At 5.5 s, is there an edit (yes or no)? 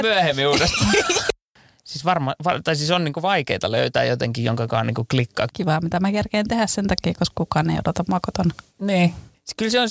yes